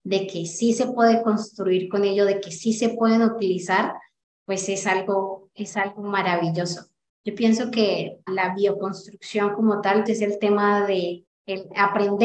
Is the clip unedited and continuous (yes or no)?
no